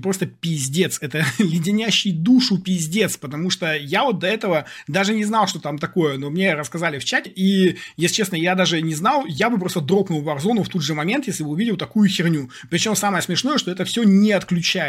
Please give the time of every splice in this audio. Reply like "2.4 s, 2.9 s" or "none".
7.3 s